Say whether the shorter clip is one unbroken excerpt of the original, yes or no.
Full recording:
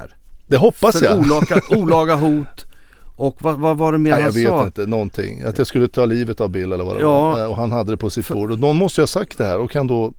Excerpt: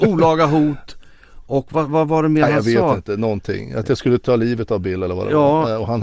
yes